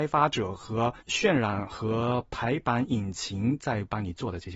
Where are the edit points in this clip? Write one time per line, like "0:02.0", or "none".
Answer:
0:01.0